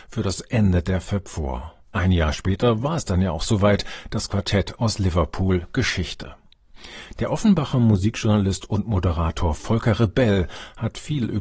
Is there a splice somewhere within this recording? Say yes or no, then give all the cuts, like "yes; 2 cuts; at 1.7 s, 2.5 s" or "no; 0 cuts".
no; 0 cuts